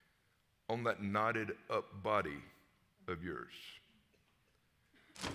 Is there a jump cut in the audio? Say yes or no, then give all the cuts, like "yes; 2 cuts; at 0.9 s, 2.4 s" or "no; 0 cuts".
no; 0 cuts